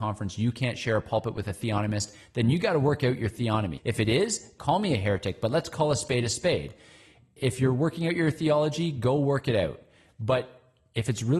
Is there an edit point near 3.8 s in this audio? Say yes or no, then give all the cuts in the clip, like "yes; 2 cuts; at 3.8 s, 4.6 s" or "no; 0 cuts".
yes; 1 cut; at 3.8 s